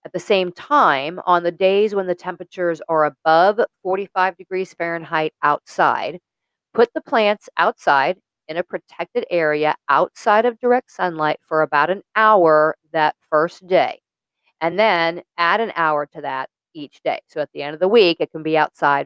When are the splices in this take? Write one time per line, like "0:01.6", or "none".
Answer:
none